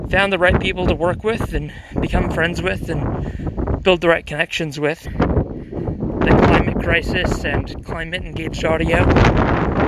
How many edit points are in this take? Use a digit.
1